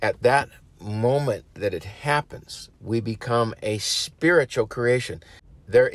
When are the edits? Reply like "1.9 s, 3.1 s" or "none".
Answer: 2.8 s